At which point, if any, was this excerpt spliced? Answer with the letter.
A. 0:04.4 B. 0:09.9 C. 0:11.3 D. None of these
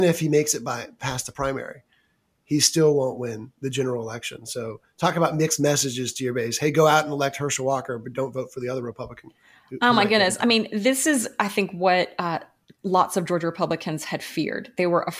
D